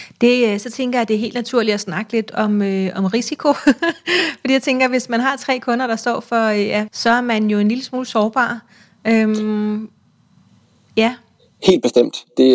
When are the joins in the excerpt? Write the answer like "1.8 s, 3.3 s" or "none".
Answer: 6.9 s

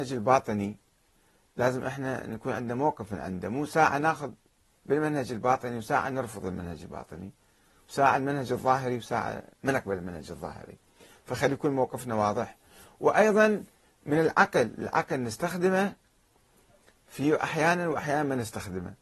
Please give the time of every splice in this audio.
9.5 s

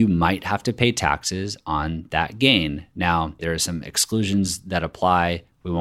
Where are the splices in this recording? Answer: 3.4 s

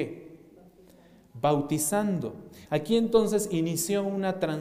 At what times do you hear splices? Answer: 2.7 s

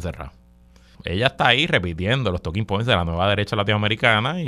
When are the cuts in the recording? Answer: 0.9 s

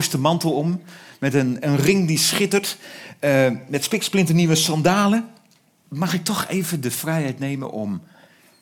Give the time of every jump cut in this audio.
5.8 s

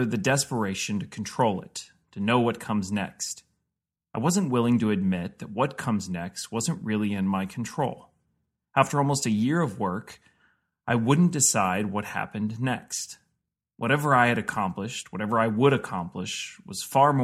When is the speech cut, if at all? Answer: none

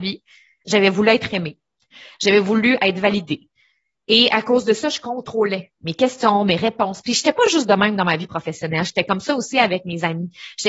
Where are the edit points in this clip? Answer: none

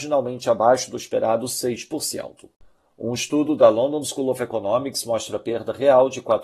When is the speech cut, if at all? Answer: none

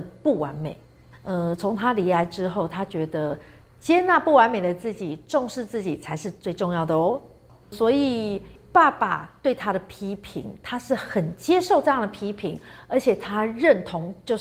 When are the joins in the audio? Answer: 7.6 s

